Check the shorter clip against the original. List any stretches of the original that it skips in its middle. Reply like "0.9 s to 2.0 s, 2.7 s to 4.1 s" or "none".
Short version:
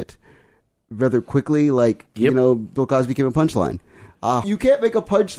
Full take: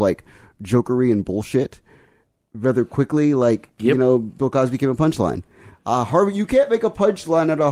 6.1 s to 6.3 s